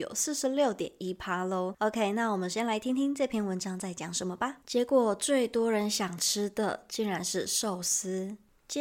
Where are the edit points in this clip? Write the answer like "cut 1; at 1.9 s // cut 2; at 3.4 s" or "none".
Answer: cut 1; at 4.6 s